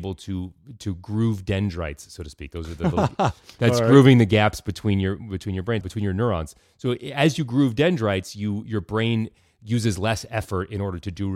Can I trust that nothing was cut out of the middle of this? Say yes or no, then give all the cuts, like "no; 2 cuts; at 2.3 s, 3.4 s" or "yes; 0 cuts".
no; 1 cut; at 5.8 s